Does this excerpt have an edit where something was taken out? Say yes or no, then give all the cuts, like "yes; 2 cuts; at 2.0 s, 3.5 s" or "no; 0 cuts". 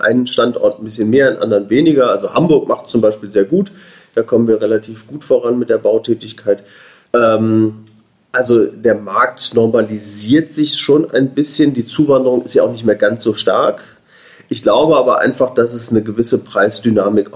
yes; 1 cut; at 7.1 s